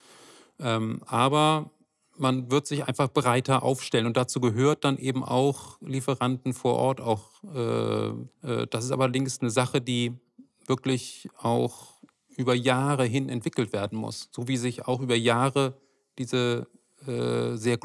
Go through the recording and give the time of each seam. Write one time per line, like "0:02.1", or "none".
0:08.3